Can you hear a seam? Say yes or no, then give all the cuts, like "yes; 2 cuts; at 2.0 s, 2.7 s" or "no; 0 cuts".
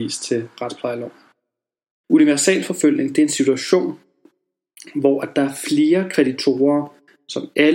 yes; 1 cut; at 2.0 s